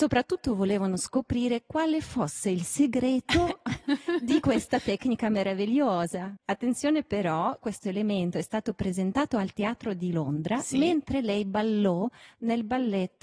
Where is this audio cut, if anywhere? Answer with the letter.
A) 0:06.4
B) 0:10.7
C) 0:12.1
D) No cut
A